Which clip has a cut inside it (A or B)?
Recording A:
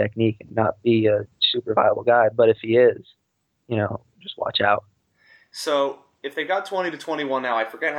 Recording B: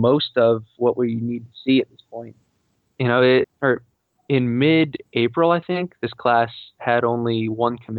B